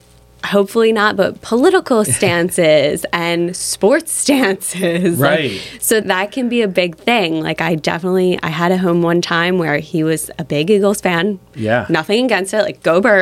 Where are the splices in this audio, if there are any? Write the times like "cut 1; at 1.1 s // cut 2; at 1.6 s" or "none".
cut 1; at 6.0 s